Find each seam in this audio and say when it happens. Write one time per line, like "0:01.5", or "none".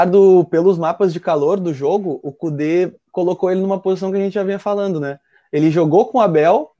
none